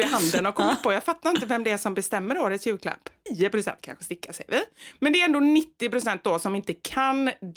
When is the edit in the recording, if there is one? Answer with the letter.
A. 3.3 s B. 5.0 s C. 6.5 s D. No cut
A